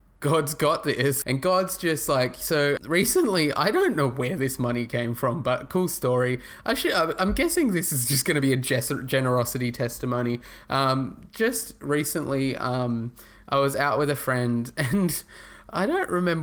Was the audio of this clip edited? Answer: yes; 2 cuts; at 1.2 s, 2.8 s

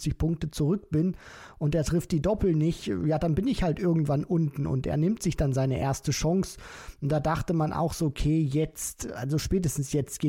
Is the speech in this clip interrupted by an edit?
no; 0 cuts

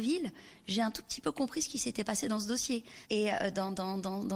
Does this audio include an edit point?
yes; 1 cut; at 3.0 s

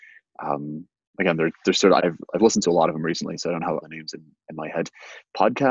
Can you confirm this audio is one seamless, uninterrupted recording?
no; 2 cuts; at 2.0 s, 3.8 s

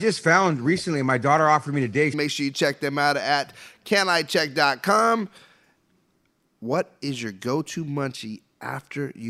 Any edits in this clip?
yes; 1 cut; at 2.1 s

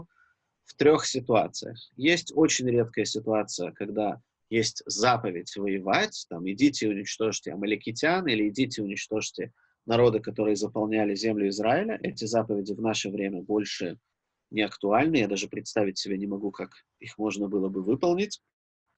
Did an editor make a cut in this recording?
no; 0 cuts

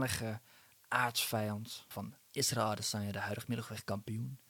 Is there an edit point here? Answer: yes; 1 cut; at 1.9 s

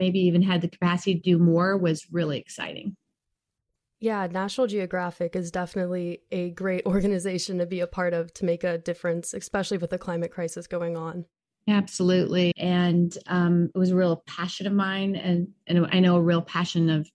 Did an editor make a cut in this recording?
yes; 1 cut; at 12.5 s

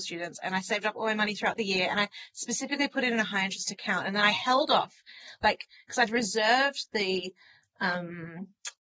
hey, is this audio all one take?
yes; 0 cuts

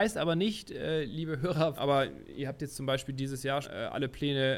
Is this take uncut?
no; 2 cuts; at 1.8 s, 3.6 s

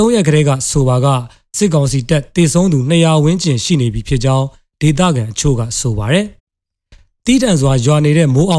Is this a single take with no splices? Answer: no; 1 cut; at 6.4 s

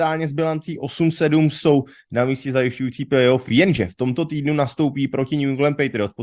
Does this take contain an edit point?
no; 0 cuts

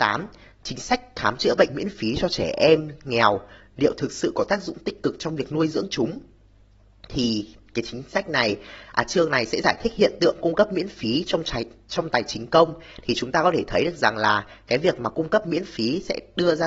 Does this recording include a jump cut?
no; 0 cuts

